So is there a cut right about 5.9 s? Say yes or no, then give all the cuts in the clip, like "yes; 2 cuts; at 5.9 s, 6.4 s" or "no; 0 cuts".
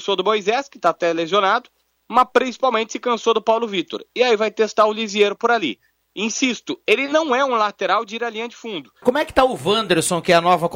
no; 1 cut; at 9.0 s